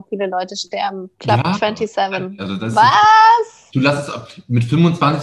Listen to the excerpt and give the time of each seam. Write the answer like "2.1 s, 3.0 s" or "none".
1.1 s, 2.4 s, 3.7 s